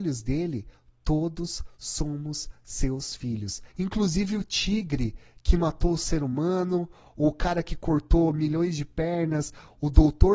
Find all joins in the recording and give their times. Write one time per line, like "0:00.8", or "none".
0:03.7
0:07.1